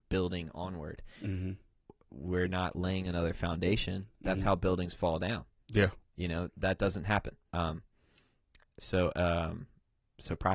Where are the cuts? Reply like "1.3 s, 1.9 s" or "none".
7.5 s

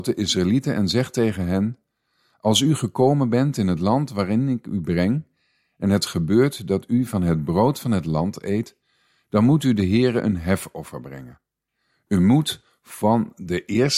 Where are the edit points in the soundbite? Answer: none

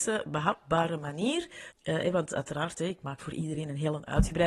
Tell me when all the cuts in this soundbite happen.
1.7 s

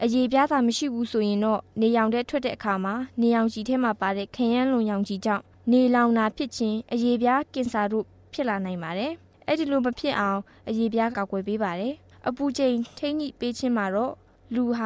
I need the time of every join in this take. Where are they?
11.1 s

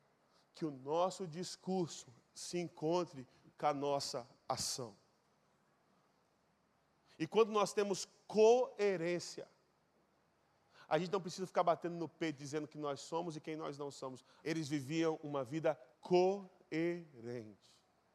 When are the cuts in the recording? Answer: 14.4 s, 15.9 s

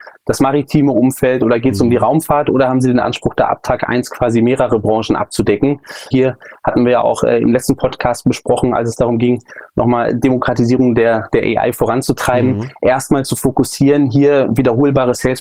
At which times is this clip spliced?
6.1 s

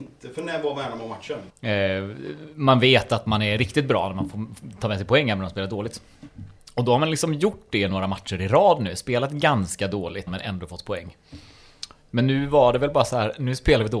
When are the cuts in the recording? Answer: 1.5 s, 10.3 s

